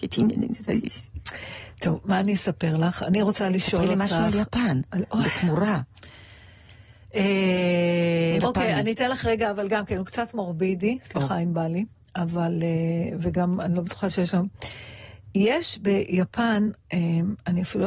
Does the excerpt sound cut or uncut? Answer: cut